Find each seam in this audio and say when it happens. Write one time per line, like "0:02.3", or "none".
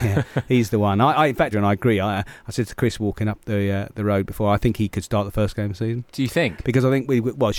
0:01.5

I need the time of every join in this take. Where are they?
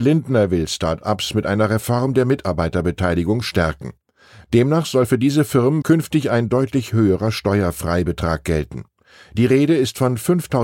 0:05.8

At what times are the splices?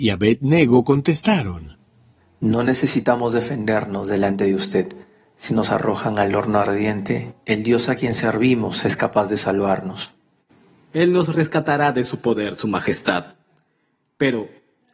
0:02.2

